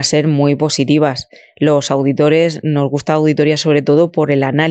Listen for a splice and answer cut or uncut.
uncut